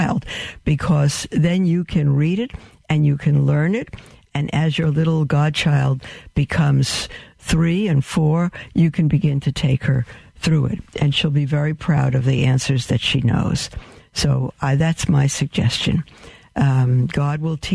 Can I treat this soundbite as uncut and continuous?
yes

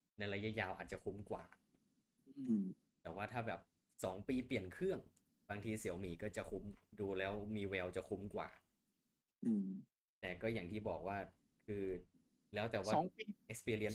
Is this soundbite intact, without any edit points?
yes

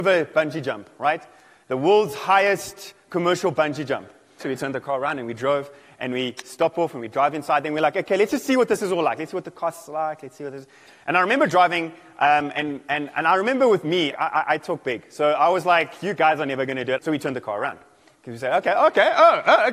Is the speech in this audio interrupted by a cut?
yes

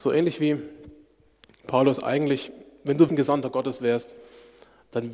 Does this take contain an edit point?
yes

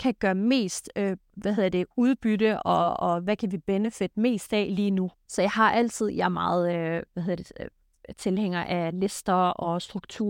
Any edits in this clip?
yes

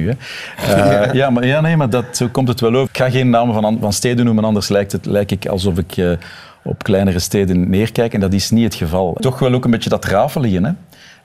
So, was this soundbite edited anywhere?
yes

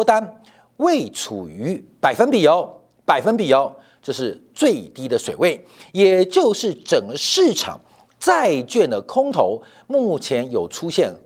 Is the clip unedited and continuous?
yes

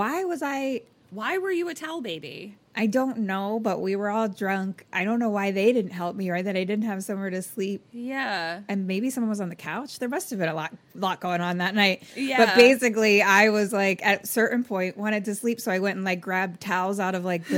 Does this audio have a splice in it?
no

